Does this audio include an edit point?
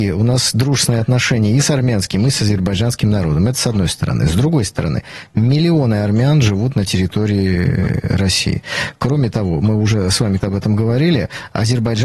yes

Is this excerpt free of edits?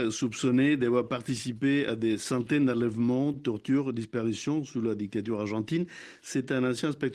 yes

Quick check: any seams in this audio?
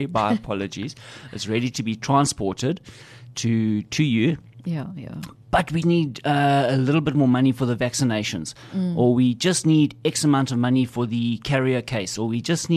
yes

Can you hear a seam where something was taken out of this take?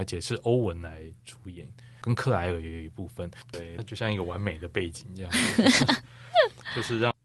yes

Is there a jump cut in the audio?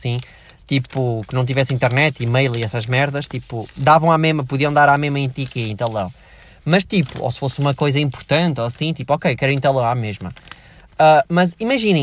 no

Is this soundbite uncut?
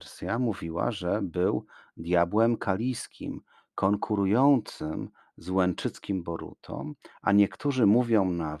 yes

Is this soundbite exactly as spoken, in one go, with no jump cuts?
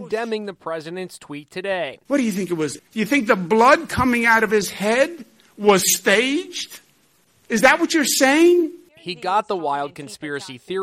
no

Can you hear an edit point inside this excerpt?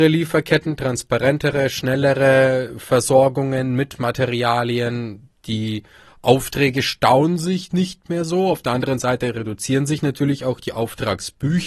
no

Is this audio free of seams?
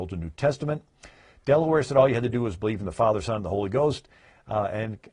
yes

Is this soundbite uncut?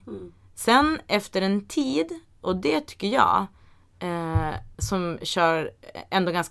no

